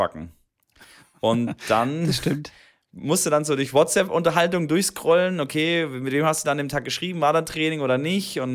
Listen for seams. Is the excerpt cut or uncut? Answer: uncut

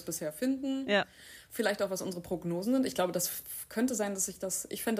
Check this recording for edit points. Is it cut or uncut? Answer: uncut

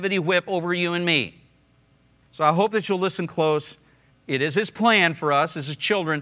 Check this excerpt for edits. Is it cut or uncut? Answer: cut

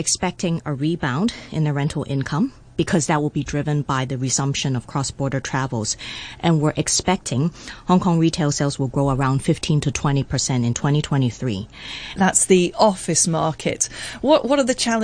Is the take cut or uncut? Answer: cut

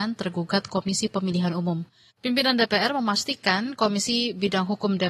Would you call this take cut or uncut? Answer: cut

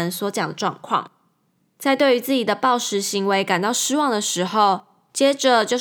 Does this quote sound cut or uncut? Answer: uncut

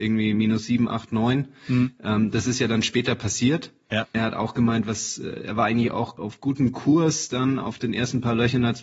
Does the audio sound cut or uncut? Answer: uncut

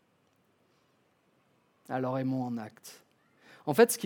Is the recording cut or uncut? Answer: uncut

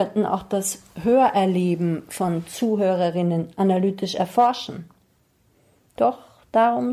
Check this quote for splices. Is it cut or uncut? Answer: uncut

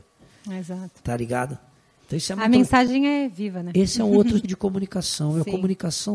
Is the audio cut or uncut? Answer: cut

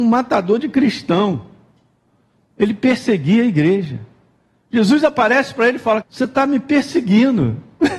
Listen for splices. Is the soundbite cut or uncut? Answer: cut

